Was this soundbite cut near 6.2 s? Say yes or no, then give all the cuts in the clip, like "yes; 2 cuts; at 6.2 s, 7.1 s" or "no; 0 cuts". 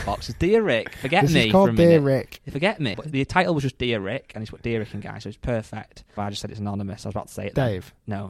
yes; 2 cuts; at 2.9 s, 6.2 s